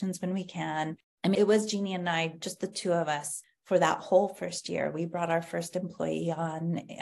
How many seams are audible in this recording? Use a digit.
1